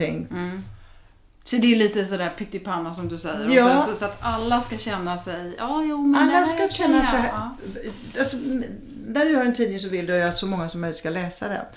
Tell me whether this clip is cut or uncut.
uncut